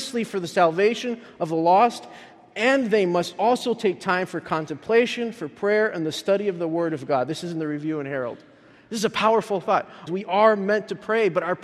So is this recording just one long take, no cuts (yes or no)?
no